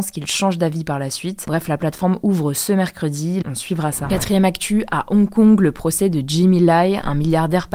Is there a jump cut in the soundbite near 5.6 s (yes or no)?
no